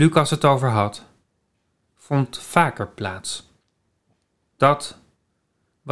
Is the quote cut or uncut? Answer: cut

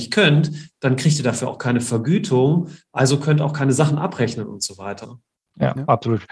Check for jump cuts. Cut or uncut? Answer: cut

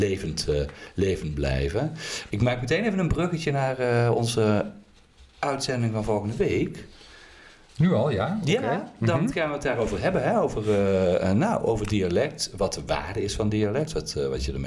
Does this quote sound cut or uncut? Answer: cut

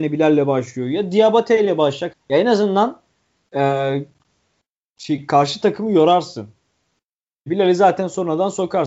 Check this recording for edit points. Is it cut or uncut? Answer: cut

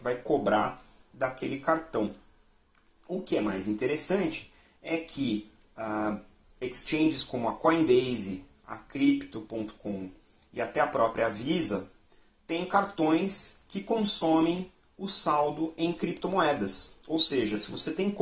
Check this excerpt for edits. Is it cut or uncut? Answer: uncut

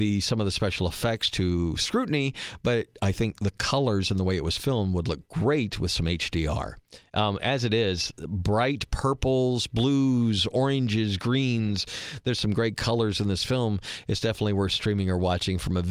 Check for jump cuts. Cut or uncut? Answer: uncut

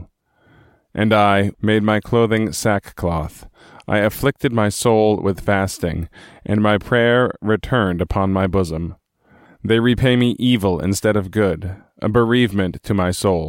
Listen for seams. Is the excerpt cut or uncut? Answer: cut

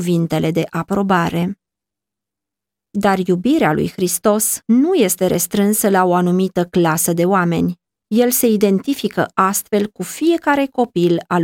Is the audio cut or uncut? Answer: uncut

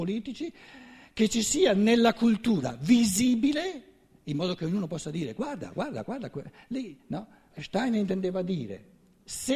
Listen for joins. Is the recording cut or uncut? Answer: cut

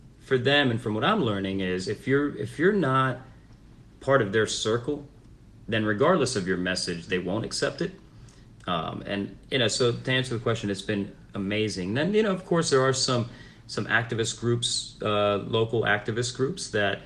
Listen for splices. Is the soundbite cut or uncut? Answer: cut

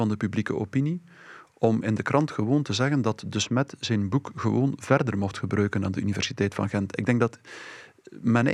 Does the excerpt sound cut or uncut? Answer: uncut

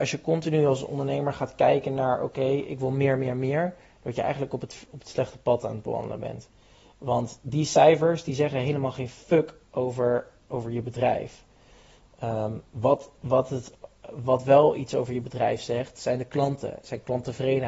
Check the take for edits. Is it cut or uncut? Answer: uncut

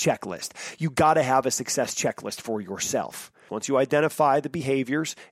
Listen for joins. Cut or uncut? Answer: cut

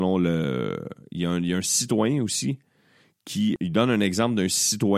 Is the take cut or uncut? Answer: cut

